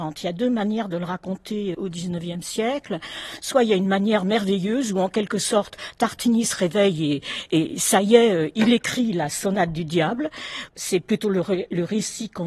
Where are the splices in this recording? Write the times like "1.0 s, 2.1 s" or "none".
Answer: 1.7 s, 10.7 s